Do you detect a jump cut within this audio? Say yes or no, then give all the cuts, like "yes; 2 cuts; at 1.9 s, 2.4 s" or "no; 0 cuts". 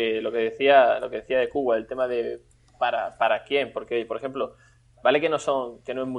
no; 0 cuts